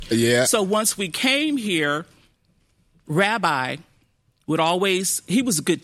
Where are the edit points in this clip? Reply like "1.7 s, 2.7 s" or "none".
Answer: 3.0 s